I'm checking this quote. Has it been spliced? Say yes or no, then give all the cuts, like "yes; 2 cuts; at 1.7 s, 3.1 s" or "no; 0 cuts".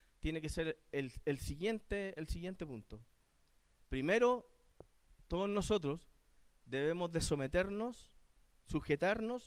no; 0 cuts